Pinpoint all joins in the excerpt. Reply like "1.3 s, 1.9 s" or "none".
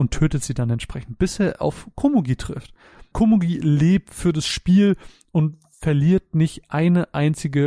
none